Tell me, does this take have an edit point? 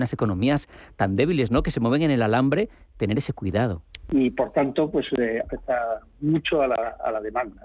yes; 2 cuts; at 4.0 s, 5.4 s

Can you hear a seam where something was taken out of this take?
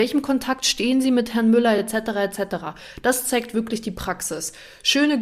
no; 0 cuts

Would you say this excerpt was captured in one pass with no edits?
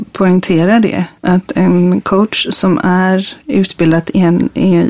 yes; 0 cuts

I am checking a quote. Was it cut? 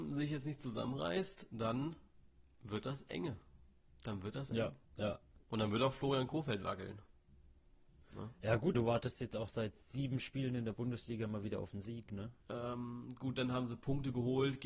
yes; 3 cuts; at 4.8 s, 8.7 s, 12.4 s

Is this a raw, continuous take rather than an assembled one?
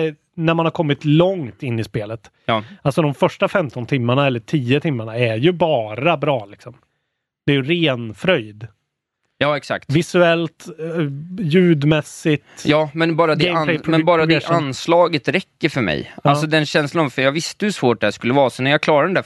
yes; 0 cuts

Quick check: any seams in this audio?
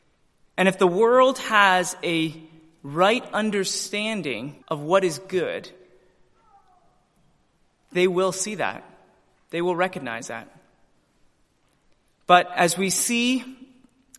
yes; 1 cut; at 4.6 s

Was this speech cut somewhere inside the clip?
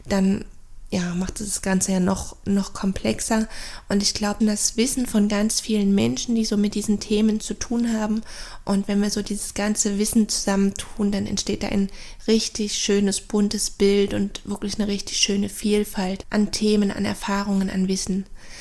yes; 2 cuts; at 4.4 s, 16.2 s

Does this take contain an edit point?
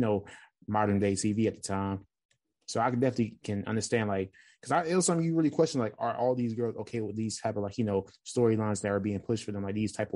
no; 0 cuts

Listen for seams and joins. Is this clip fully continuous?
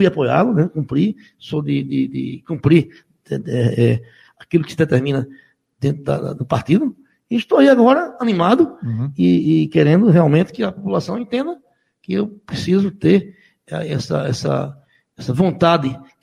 yes; 0 cuts

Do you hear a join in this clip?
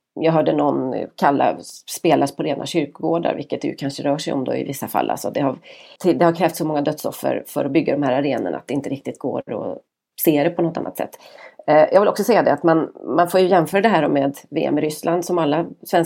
yes; 1 cut; at 6.0 s

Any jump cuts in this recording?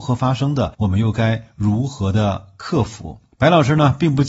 no; 0 cuts

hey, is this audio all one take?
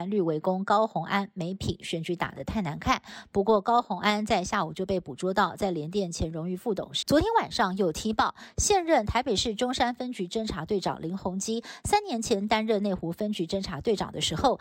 no; 1 cut; at 7.0 s

